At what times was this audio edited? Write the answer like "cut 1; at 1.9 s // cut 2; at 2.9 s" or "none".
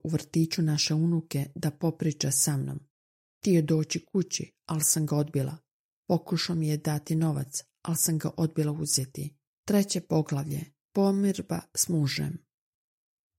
cut 1; at 9.5 s